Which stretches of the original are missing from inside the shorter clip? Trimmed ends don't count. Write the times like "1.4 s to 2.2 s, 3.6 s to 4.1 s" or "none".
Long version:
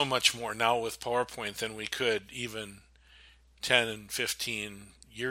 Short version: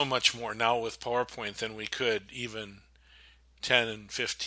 none